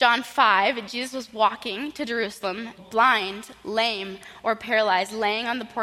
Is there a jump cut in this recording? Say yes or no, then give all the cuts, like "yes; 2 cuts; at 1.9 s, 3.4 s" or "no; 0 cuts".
yes; 1 cut; at 2.8 s